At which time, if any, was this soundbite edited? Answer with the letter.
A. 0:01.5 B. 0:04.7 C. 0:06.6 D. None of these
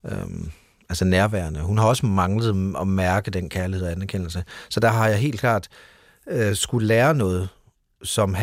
D